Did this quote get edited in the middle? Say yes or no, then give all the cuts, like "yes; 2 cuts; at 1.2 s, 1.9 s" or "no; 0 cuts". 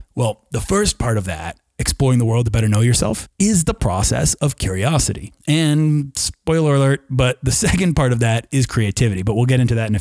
no; 0 cuts